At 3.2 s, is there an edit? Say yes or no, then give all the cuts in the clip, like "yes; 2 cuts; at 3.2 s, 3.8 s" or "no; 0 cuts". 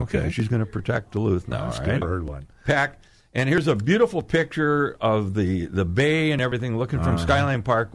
no; 1 cut; at 2.0 s